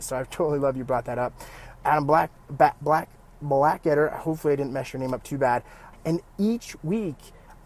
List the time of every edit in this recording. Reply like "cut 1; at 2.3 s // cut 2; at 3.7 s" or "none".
cut 1; at 5.9 s

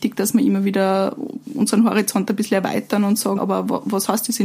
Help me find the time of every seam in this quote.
cut 1; at 3.4 s

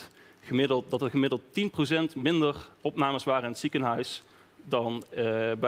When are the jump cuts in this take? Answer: none

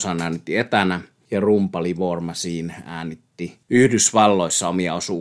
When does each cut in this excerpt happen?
none

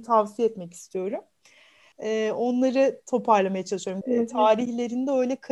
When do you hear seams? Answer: cut 1; at 1.9 s // cut 2; at 4.0 s

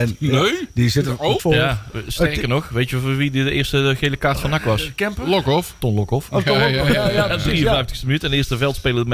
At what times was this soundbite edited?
cut 1; at 1.4 s

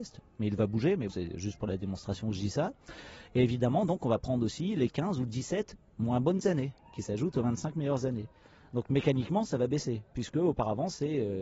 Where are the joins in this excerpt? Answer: cut 1; at 1.1 s

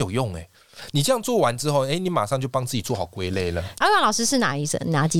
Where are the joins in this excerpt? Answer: cut 1; at 3.8 s

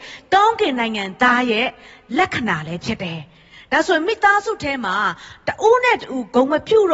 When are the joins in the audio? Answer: none

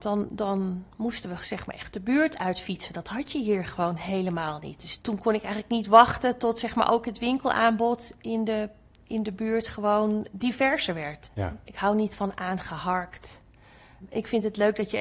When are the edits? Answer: cut 1; at 11.4 s

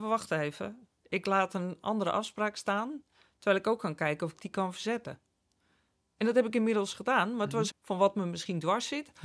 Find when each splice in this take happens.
cut 1; at 1.0 s // cut 2; at 7.7 s

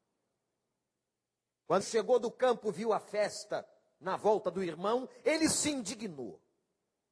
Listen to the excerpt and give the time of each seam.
cut 1; at 1.8 s

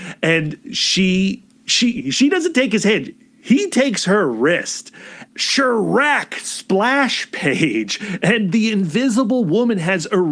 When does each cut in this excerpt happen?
cut 1; at 5.3 s

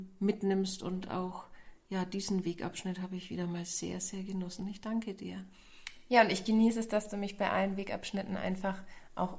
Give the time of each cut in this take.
none

